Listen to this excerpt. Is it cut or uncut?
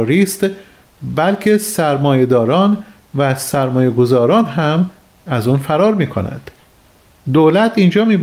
uncut